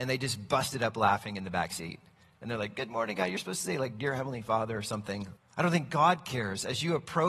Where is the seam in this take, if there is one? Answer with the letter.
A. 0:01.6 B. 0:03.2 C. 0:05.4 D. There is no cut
C